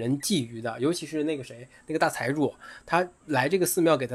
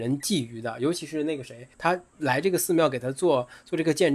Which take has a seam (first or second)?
second